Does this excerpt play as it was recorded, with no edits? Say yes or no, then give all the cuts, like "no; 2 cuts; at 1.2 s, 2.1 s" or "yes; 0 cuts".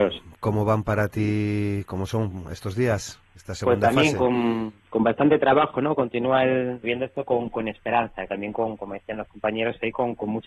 no; 2 cuts; at 6.8 s, 8.3 s